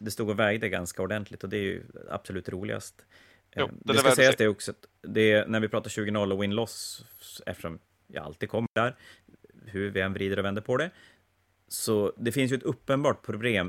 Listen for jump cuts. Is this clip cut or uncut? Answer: uncut